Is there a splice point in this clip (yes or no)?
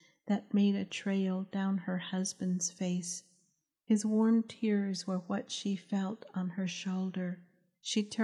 no